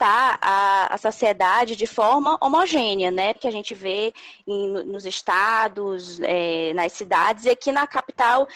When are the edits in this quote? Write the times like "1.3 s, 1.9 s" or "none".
3.4 s